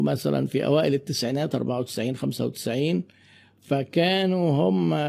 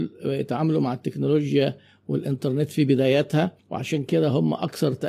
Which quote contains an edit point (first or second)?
second